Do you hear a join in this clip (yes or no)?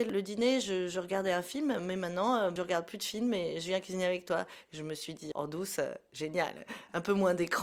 no